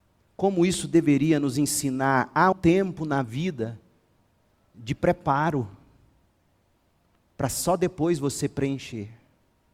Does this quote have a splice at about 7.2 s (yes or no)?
no